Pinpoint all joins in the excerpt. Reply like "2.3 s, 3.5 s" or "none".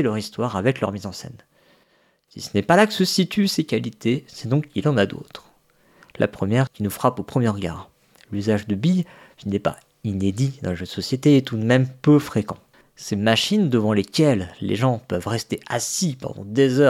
6.7 s, 12.8 s

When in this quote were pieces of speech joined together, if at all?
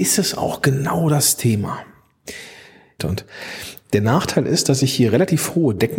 3.0 s

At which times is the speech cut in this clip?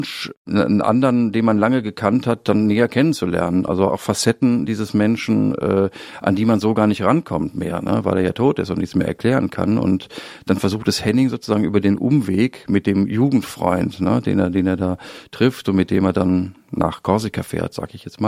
none

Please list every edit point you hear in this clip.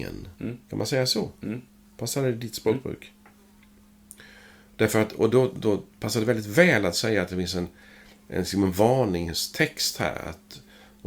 none

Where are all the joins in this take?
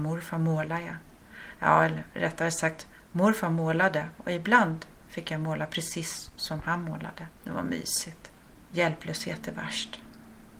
7.4 s, 8.7 s

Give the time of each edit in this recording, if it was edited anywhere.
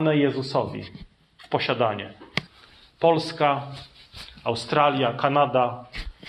none

